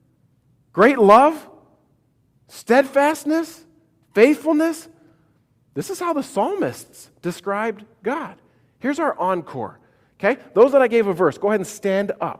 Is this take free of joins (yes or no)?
yes